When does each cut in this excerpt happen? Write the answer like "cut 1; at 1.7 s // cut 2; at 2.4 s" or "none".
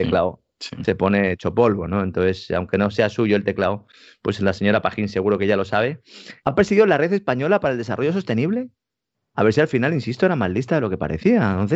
cut 1; at 6.4 s // cut 2; at 9.3 s